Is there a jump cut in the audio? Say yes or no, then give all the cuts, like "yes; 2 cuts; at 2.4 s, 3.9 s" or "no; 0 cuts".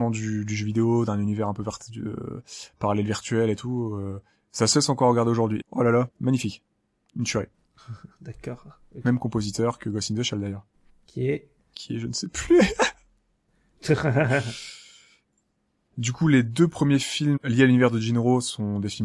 yes; 1 cut; at 5.6 s